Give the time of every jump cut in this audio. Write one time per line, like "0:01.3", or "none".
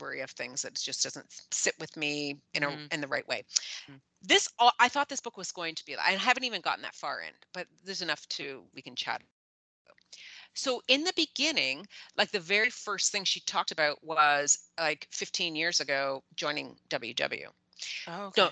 none

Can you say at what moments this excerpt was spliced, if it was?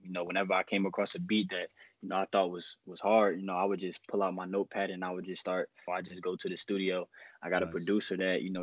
0:05.9

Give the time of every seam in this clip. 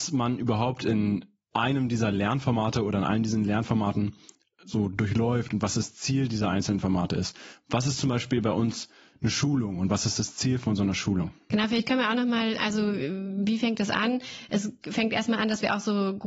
0:11.5
0:12.6

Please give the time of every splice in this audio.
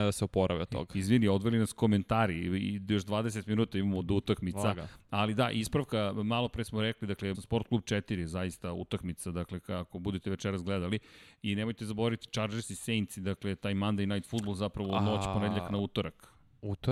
0:07.3

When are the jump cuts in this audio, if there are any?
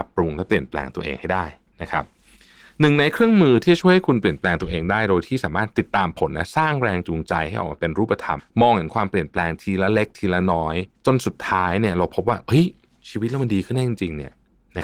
0:08.4
0:10.9

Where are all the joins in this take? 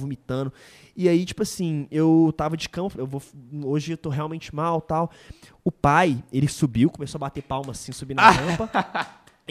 0:02.9

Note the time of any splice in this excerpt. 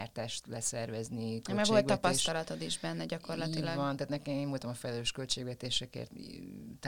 none

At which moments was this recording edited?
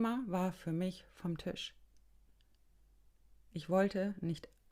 none

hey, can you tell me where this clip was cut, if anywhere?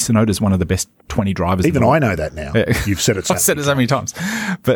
0:01.0

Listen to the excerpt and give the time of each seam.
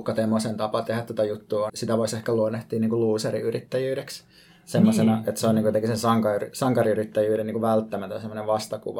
0:01.7

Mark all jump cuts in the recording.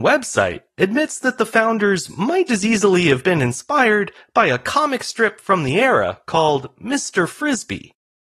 0:02.5

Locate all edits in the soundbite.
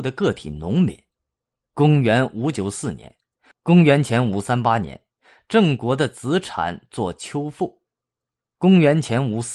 0:03.5

